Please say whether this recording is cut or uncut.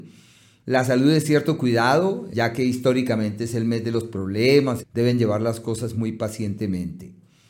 cut